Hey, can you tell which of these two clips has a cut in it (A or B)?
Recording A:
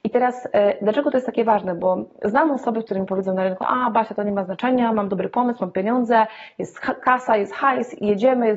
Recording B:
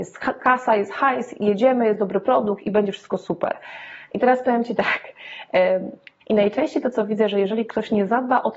B